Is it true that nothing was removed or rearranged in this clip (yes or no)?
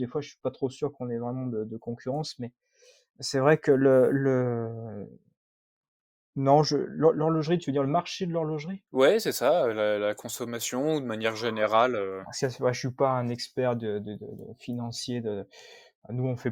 no